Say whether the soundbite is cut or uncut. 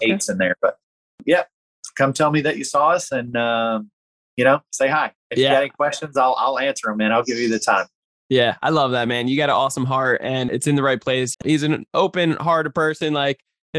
cut